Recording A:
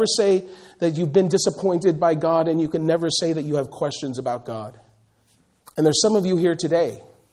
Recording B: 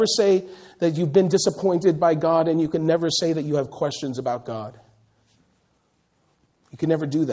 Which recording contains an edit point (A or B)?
A